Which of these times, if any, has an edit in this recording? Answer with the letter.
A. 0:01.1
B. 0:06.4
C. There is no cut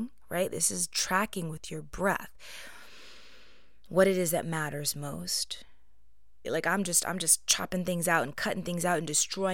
B